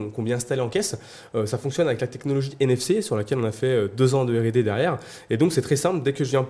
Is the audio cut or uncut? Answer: uncut